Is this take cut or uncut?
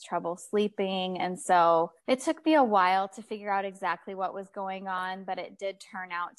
cut